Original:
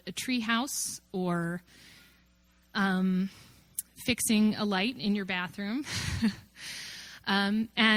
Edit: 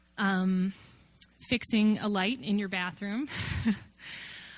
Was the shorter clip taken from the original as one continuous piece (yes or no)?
yes